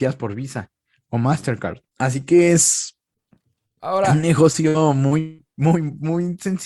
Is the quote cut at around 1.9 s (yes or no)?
yes